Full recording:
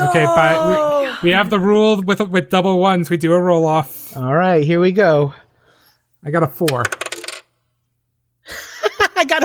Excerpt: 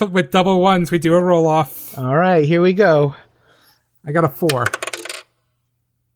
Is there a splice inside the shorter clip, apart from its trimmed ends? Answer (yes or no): no